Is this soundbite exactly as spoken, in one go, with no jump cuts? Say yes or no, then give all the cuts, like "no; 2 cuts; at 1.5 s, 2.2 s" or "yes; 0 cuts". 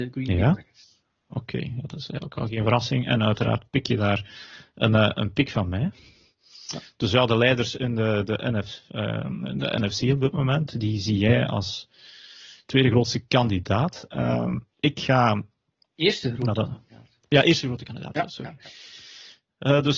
yes; 0 cuts